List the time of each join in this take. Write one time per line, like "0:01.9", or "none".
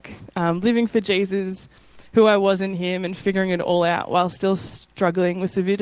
none